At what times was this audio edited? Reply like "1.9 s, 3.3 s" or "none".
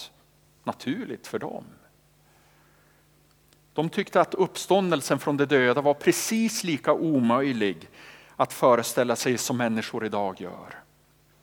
none